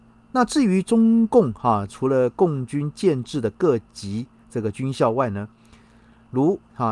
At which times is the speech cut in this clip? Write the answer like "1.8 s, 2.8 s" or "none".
1.9 s